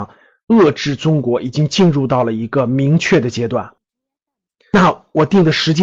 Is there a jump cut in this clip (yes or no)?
yes